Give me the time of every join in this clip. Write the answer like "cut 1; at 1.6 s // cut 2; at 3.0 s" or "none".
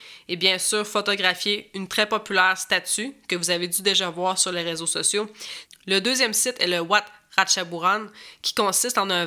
cut 1; at 5.6 s